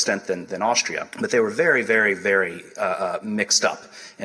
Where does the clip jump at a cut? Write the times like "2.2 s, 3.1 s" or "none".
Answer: 1.1 s